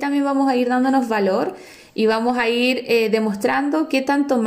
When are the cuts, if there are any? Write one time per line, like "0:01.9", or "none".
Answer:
none